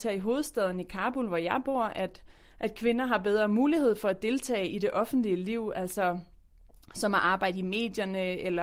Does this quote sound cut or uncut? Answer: uncut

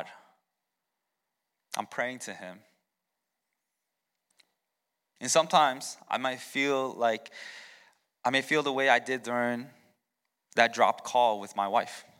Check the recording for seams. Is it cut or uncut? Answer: cut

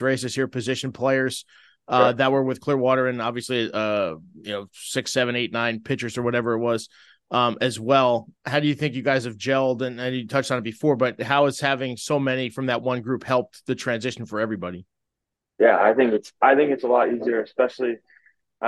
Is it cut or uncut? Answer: uncut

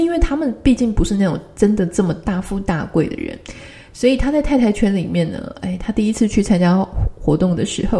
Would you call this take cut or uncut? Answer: uncut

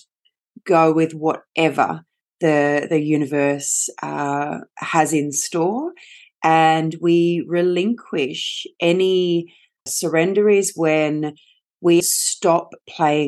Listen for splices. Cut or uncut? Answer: cut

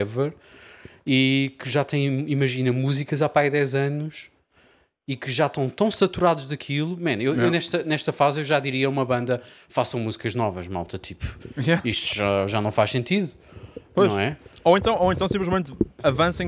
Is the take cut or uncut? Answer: uncut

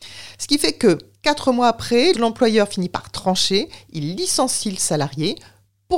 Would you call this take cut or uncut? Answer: cut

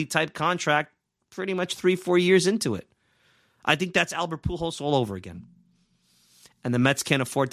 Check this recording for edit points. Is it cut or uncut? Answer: uncut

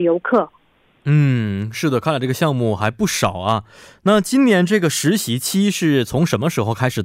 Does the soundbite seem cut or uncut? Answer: uncut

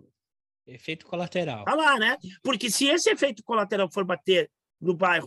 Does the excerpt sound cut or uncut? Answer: uncut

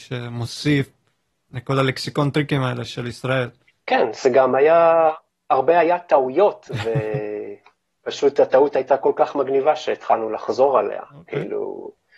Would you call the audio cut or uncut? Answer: uncut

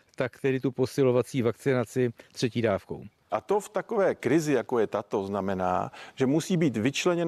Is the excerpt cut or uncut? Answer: cut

